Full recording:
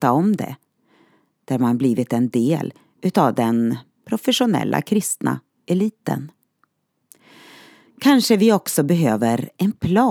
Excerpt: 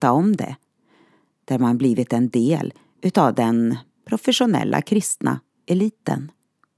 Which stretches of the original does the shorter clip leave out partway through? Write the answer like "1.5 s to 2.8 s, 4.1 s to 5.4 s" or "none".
none